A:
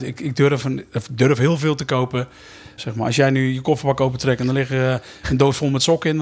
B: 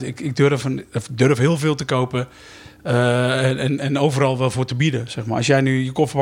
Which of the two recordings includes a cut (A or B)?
A